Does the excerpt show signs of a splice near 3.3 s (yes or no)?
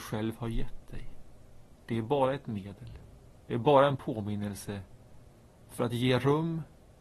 no